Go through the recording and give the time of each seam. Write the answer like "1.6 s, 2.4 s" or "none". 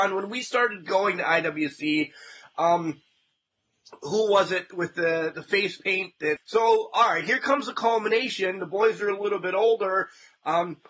6.4 s